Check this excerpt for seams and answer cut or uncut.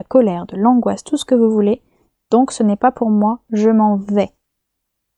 uncut